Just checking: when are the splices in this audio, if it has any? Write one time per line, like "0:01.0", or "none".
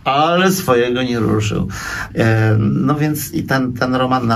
0:02.1